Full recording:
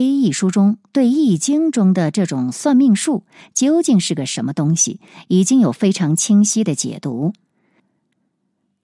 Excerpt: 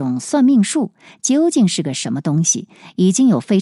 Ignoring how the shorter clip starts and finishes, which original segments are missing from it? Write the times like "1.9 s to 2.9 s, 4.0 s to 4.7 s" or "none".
none